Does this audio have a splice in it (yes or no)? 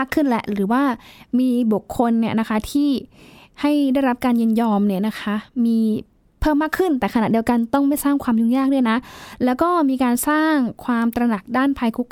no